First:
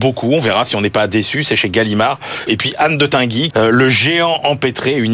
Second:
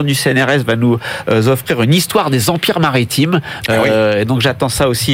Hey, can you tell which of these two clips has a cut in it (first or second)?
first